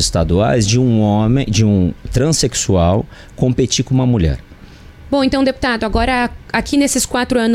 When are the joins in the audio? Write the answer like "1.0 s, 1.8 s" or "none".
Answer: 5.0 s